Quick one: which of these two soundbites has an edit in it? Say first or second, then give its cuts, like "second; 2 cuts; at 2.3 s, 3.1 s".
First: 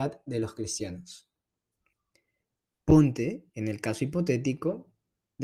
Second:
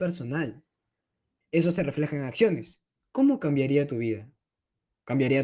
second; 2 cuts; at 1.4 s, 3.0 s